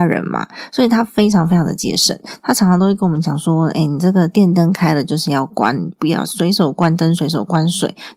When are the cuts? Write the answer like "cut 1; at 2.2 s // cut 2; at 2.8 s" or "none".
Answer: none